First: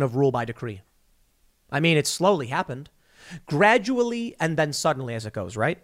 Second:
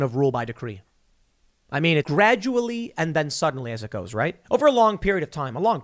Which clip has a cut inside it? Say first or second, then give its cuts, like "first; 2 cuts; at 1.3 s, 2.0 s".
second; 2 cuts; at 2.0 s, 4.4 s